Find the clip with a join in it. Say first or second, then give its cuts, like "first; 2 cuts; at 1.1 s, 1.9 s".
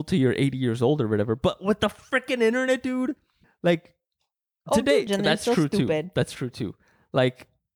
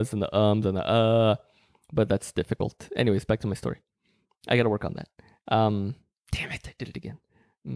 first; 2 cuts; at 3.4 s, 5.1 s